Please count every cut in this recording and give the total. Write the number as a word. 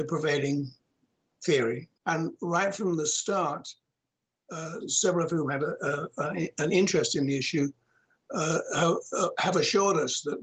two